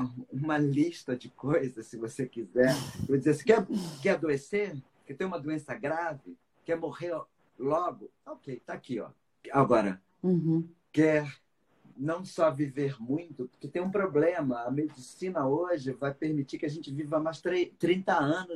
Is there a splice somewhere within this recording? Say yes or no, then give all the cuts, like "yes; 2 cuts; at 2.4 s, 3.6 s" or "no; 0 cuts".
yes; 1 cut; at 9.4 s